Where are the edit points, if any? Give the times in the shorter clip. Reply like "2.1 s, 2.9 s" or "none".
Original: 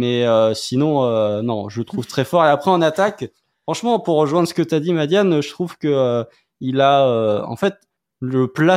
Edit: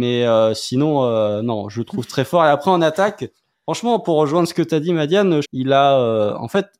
5.4 s